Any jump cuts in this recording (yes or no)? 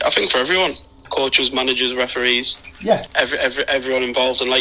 yes